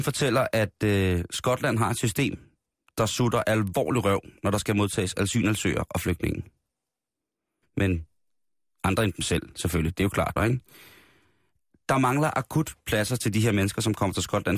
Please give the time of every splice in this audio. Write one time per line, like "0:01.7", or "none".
0:07.6
0:10.4